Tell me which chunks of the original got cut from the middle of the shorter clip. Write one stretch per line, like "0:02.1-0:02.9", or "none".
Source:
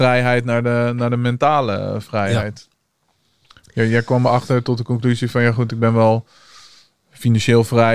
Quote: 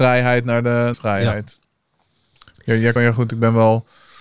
0:00.9-0:02.0
0:04.0-0:05.4